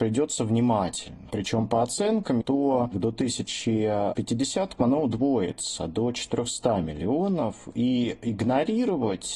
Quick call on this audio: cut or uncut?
cut